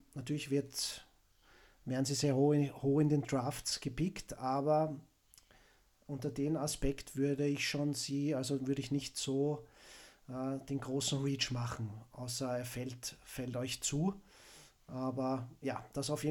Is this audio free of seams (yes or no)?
yes